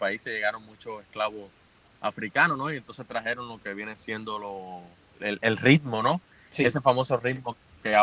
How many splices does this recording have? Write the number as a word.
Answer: one